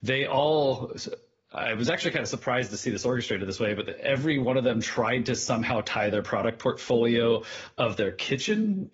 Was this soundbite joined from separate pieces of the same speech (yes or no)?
no